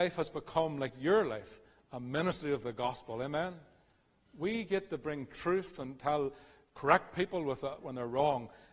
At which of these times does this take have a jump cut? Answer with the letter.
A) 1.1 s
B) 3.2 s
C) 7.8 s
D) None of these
C